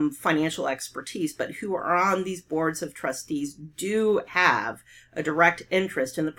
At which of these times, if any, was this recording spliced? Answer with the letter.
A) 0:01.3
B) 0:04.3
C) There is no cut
B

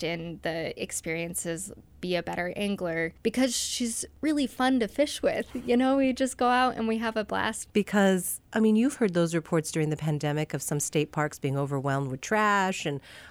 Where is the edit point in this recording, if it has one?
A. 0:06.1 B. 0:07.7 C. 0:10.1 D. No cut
B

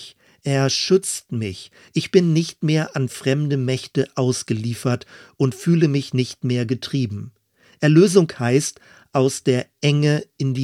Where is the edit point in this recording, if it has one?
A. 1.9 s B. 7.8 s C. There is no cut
A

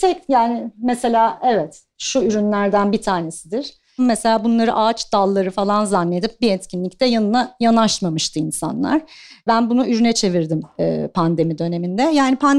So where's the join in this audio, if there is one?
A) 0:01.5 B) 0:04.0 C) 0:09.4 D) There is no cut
B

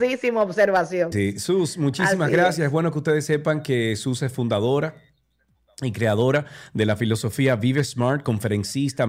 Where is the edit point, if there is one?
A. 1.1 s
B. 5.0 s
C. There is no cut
A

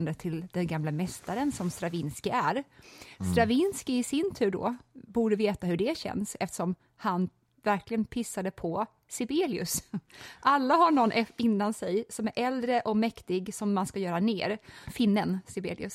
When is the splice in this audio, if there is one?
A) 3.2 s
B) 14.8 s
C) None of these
B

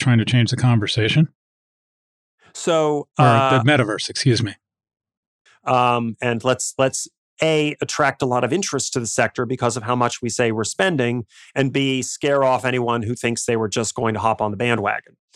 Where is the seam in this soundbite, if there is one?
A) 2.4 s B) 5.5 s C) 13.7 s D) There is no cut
B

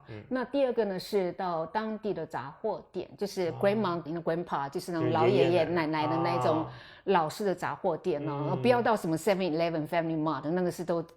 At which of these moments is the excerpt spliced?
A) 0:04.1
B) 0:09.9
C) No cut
A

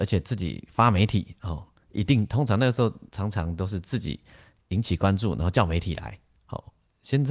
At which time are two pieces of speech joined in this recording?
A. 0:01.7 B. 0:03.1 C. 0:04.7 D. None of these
D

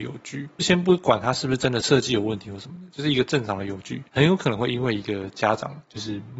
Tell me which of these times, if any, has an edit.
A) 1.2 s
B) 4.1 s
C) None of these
B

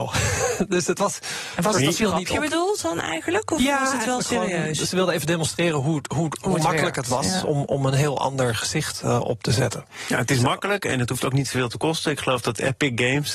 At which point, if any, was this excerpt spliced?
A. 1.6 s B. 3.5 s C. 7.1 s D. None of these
D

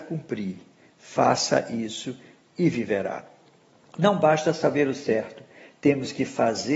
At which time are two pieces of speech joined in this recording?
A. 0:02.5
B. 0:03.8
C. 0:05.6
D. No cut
D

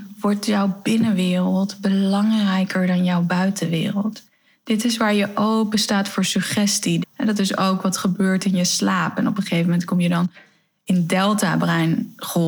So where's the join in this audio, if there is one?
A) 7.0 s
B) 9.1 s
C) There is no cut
A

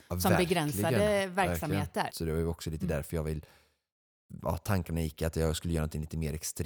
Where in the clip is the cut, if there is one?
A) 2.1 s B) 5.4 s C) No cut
A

